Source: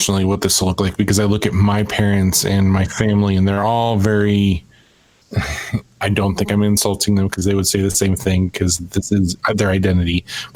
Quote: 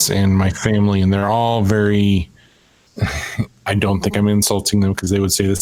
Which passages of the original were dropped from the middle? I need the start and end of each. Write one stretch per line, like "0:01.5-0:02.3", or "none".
none